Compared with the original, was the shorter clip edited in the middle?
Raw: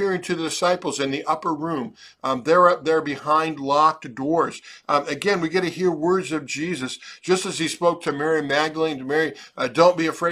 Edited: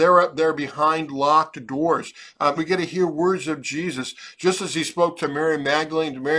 yes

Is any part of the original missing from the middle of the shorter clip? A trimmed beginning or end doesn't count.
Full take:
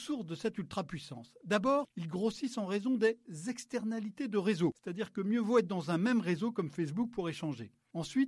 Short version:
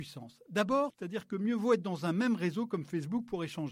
yes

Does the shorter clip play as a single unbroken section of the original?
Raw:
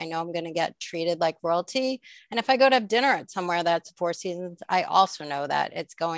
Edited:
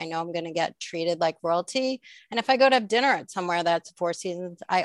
yes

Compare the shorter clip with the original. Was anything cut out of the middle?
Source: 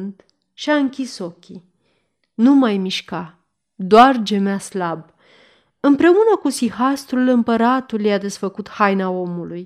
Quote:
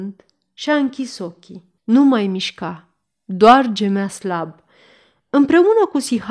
yes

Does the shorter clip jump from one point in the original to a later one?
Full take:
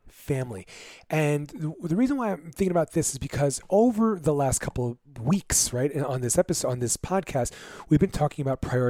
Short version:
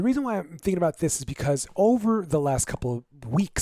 no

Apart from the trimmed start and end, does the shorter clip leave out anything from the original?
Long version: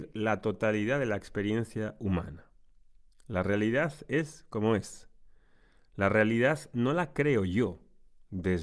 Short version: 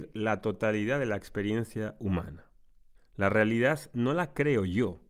yes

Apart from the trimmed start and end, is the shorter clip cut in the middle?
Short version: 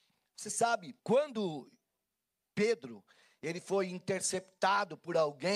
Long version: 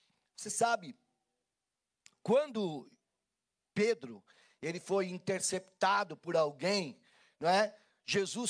yes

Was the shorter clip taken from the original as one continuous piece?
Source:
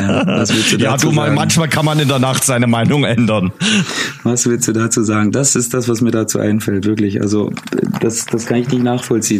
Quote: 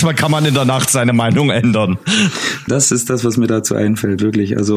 no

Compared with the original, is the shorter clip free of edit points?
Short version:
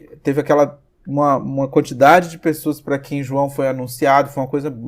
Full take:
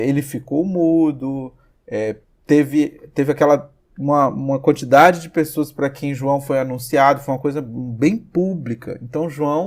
yes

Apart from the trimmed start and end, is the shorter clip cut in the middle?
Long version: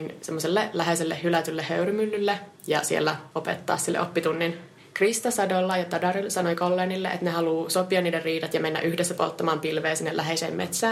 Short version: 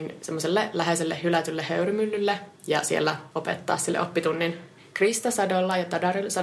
no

